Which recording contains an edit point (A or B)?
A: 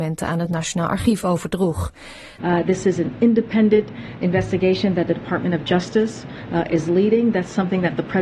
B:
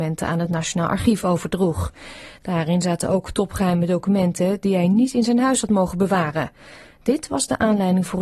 A